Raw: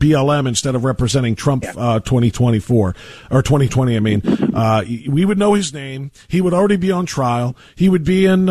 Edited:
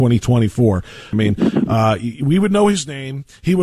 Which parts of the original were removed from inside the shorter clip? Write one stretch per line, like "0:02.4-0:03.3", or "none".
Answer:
0:03.2-0:04.0